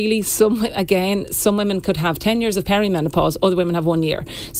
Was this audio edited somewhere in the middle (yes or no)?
no